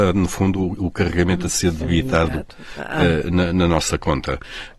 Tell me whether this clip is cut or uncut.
uncut